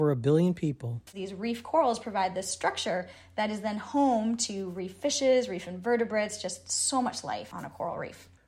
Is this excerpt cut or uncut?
cut